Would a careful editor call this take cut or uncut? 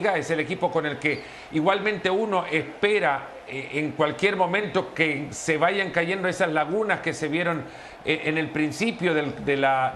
uncut